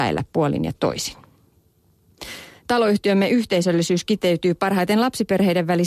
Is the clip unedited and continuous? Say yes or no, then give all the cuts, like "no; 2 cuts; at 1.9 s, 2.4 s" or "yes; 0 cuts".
yes; 0 cuts